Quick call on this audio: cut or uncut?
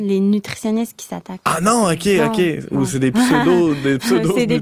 uncut